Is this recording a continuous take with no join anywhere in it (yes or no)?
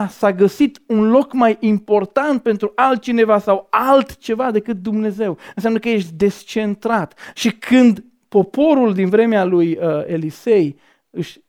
no